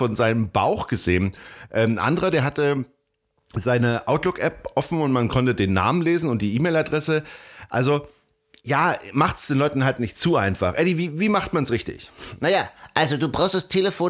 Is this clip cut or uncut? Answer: uncut